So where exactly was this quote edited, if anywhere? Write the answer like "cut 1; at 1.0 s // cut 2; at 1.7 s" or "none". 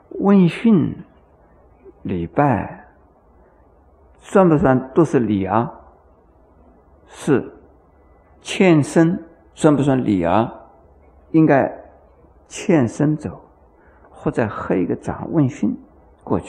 cut 1; at 11.1 s